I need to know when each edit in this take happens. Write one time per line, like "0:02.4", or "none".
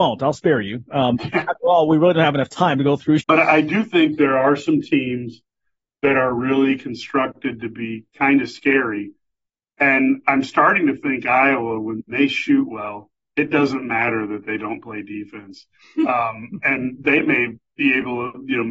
0:03.2

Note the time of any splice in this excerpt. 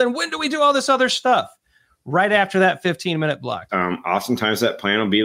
0:03.7

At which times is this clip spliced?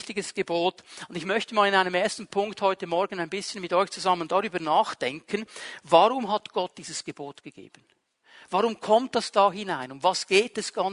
none

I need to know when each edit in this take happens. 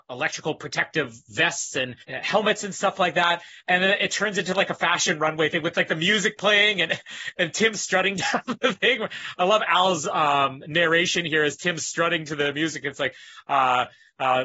0:02.0

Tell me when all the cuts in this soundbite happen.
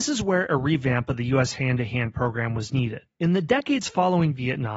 none

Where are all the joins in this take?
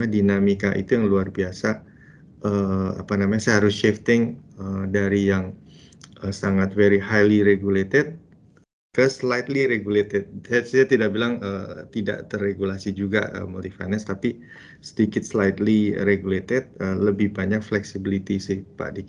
none

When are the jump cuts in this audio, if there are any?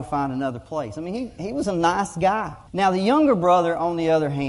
0:02.7

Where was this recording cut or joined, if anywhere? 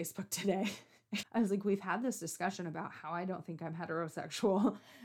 0:01.2

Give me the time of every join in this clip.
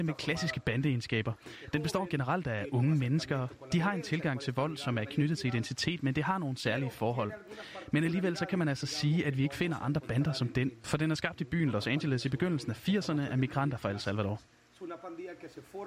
none

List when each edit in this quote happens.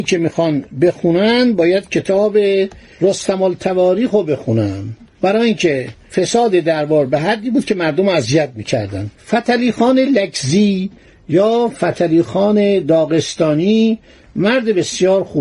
0:09.2

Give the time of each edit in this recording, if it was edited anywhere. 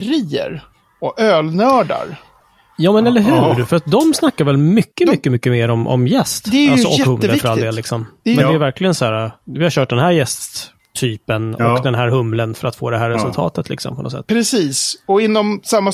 none

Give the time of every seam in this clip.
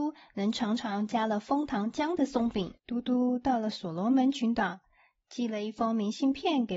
0:02.8

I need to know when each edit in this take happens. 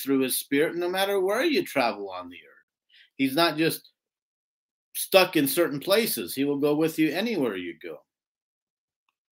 none

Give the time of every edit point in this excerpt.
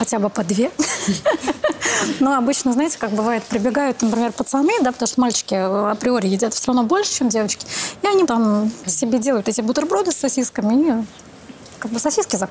0:08.3

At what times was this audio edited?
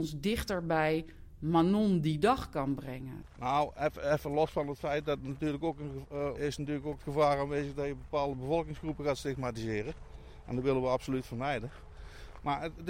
0:06.4

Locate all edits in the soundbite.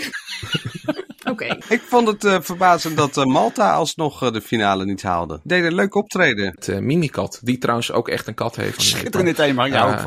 0:06.5
0:08.8

